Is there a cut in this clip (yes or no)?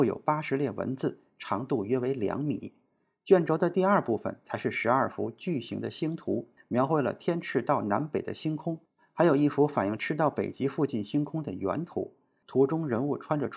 yes